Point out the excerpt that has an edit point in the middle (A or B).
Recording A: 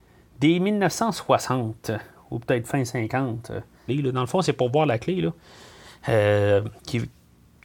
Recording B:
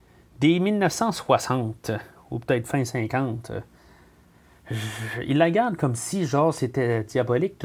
A